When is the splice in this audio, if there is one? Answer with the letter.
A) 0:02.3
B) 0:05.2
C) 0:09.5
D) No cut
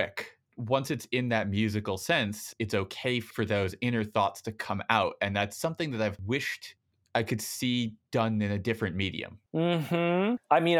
C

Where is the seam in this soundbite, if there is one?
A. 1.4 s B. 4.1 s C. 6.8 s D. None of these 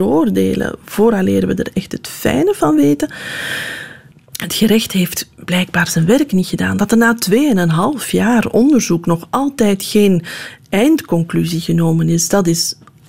B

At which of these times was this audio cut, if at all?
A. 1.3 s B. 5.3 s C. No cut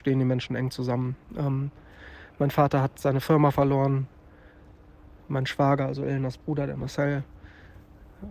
A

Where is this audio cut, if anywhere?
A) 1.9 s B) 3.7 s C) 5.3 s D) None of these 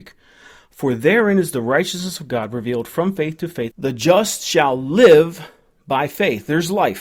B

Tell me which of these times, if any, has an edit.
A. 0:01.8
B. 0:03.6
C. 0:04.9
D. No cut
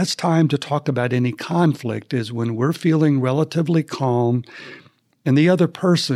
D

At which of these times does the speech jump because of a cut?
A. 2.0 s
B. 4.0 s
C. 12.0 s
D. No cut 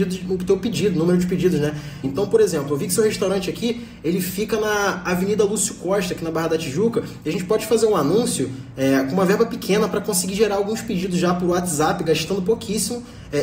A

